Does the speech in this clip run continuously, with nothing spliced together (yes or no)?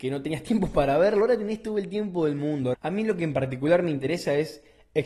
no